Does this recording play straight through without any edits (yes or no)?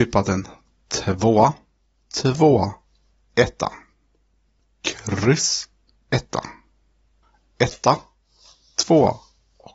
no